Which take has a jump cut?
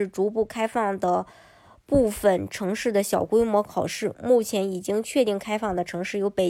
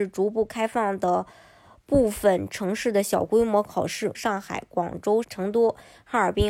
second; 2 cuts; at 4.1 s, 5.2 s

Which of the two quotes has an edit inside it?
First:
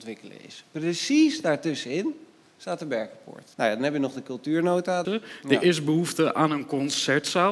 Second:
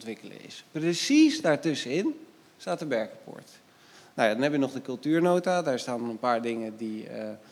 first; 2 cuts; at 3.5 s, 5.1 s

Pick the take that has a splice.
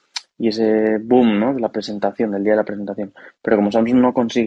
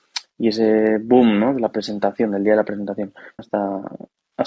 second; 1 cut; at 3.4 s

